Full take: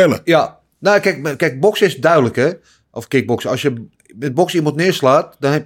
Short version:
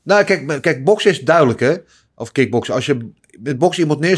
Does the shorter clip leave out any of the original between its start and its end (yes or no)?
no